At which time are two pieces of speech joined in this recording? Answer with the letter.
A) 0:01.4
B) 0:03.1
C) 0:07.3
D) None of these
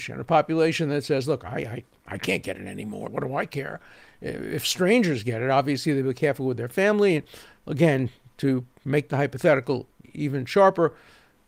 B